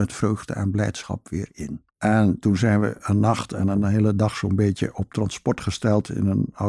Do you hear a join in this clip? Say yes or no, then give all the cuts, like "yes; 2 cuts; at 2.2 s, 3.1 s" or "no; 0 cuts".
yes; 1 cut; at 1.9 s